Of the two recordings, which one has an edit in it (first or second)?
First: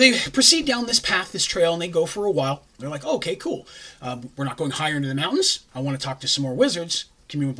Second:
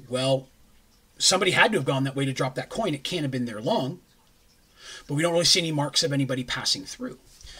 first